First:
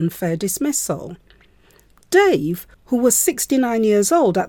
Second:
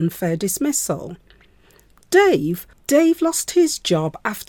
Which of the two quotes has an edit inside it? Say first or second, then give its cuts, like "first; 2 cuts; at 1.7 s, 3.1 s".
second; 1 cut; at 2.7 s